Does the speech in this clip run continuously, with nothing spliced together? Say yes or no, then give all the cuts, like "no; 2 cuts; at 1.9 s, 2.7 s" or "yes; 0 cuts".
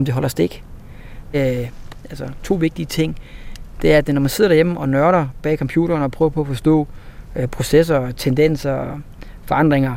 no; 1 cut; at 1.3 s